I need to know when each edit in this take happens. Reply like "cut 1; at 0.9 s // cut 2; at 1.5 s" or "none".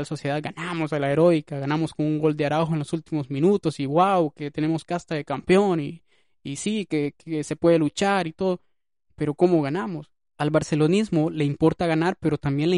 none